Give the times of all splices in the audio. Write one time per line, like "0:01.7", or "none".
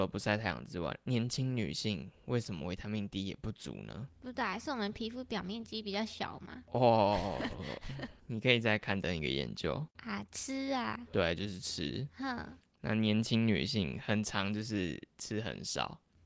none